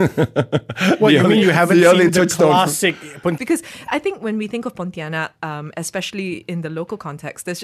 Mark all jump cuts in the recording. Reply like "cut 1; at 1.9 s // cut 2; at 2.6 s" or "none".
cut 1; at 2.1 s // cut 2; at 3.4 s